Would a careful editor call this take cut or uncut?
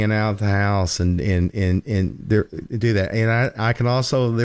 uncut